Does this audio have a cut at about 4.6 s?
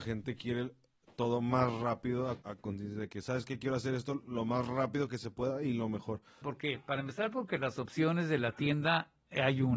no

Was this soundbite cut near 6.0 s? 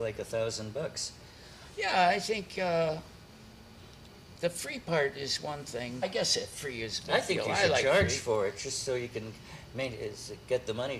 yes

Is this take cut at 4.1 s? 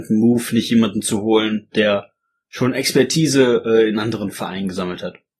no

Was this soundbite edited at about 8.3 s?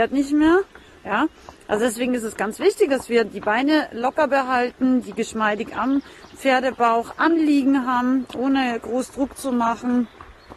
yes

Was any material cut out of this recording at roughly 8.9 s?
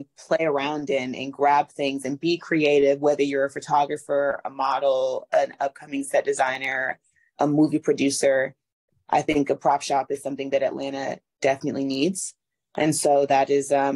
no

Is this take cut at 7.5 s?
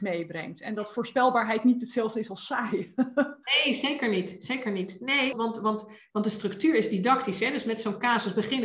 no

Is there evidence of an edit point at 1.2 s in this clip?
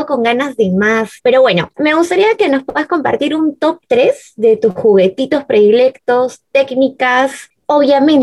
yes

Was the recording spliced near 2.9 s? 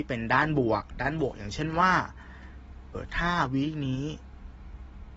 yes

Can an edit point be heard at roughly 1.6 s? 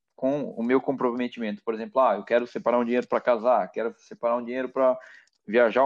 no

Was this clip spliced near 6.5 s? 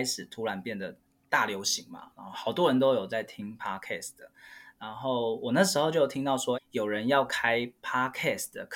yes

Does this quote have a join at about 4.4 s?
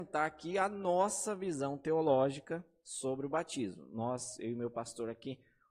no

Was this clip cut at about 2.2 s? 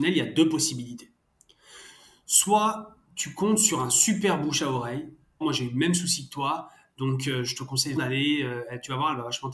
no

